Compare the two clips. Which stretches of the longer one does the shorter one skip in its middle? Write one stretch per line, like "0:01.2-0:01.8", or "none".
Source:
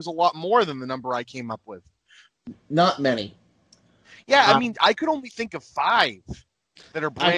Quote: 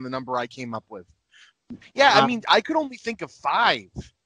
0:02.6-0:04.1